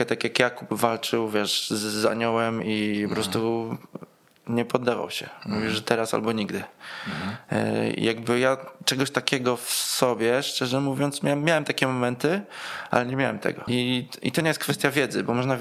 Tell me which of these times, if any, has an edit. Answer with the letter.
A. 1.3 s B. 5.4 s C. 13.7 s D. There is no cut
C